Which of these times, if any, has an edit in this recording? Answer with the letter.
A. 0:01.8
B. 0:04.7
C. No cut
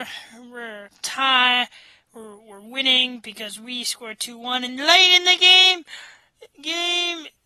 B